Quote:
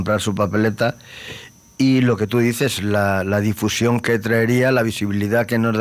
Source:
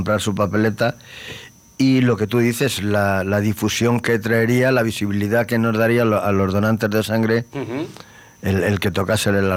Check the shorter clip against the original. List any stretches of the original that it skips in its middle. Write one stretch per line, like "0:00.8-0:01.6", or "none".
none

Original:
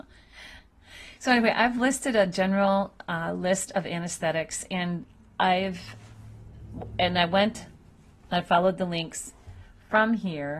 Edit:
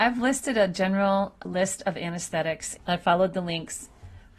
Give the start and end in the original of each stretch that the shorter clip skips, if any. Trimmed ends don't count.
0:03.0-0:03.3
0:04.7-0:08.2

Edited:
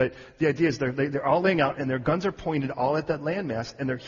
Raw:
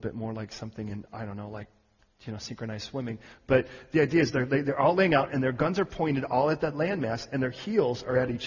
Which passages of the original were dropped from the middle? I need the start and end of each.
none

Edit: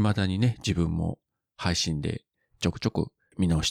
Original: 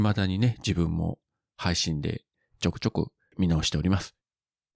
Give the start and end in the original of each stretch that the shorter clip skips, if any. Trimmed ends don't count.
none

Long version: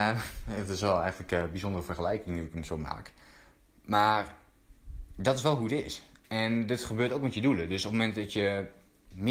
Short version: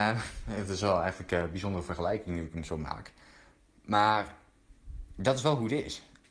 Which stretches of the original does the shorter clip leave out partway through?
none

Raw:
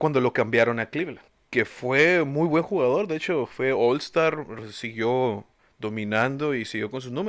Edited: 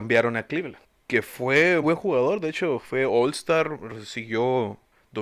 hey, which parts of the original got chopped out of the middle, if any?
0:02.2-0:02.5

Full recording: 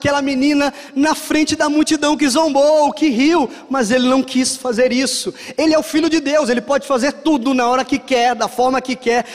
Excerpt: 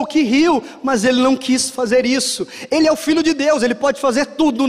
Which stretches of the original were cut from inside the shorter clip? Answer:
none

